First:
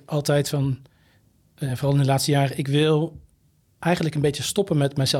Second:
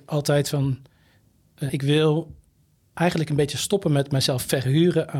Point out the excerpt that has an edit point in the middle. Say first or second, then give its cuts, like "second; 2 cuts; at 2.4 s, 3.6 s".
second; 1 cut; at 1.7 s